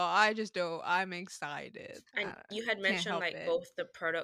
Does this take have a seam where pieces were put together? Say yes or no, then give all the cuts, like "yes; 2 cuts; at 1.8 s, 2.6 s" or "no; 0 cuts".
yes; 1 cut; at 2.1 s